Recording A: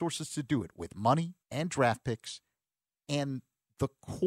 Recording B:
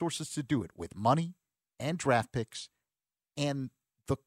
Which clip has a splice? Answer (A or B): A